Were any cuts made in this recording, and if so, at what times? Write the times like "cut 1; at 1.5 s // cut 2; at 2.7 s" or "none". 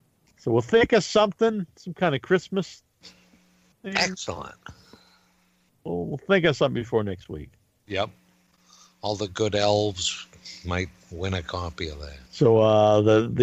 cut 1; at 12.3 s